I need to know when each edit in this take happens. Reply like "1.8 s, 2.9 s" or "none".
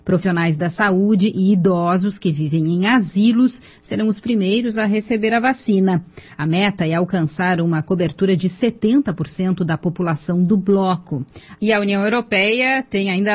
6.3 s